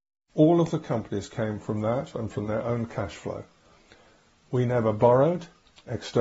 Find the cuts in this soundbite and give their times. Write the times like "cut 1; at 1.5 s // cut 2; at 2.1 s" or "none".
none